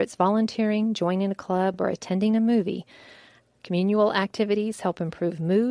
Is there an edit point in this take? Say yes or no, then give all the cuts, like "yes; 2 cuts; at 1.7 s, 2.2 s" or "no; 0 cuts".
no; 0 cuts